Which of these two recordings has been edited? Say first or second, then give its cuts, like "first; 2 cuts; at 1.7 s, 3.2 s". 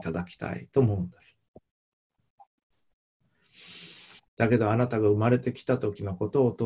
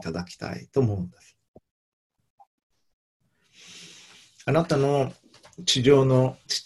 first; 1 cut; at 4.2 s